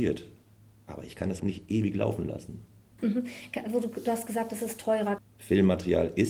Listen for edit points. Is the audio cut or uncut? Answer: cut